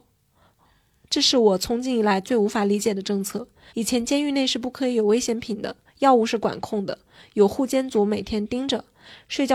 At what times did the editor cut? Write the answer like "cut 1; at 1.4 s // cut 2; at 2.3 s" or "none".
cut 1; at 3.7 s